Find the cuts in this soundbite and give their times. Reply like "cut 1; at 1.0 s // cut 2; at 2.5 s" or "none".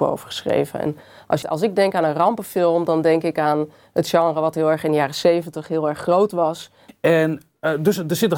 cut 1; at 1.4 s // cut 2; at 6.9 s